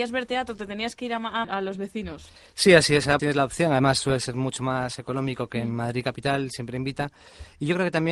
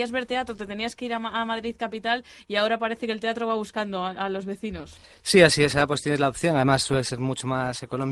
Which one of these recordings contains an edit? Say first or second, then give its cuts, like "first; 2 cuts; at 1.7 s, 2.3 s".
first; 2 cuts; at 1.4 s, 3.2 s